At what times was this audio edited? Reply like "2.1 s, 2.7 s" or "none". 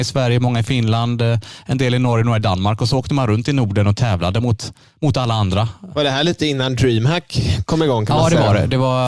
none